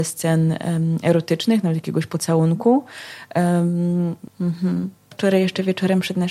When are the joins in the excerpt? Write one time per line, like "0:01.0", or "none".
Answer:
0:04.3